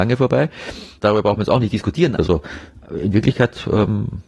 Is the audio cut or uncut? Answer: cut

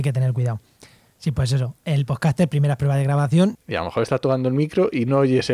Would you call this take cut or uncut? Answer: cut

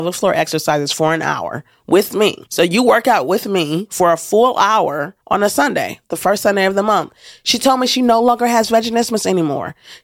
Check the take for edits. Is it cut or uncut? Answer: uncut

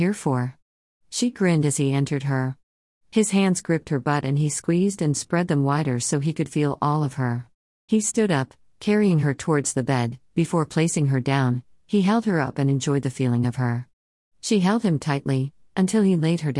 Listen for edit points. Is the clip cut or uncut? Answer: cut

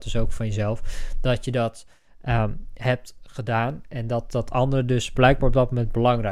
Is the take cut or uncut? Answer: uncut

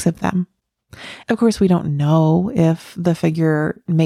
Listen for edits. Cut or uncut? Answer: cut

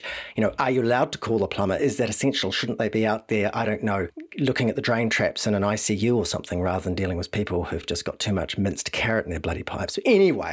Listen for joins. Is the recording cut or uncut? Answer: uncut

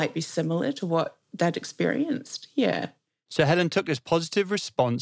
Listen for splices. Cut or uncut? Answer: cut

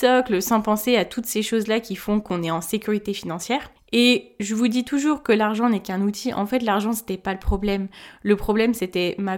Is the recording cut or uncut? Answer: uncut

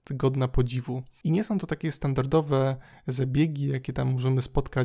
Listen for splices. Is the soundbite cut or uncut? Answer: uncut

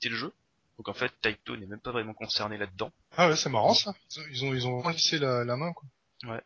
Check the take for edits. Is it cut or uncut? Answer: cut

